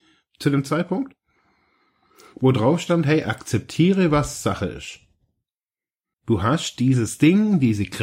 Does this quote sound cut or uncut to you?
cut